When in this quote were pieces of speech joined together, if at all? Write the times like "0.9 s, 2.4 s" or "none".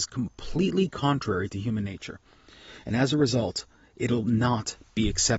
none